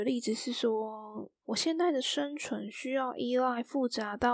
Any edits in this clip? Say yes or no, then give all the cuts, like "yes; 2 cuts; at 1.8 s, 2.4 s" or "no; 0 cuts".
yes; 1 cut; at 1.4 s